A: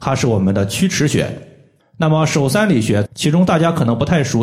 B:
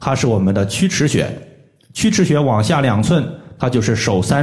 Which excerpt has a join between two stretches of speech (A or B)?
A